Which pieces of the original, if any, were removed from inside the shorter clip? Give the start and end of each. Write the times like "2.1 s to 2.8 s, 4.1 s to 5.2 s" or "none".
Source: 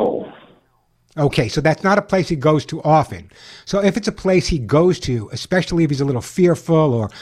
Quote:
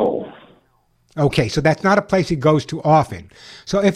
none